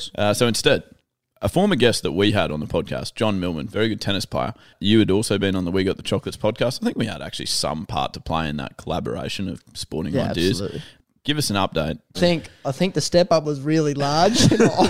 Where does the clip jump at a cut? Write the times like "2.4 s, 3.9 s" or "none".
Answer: 12.1 s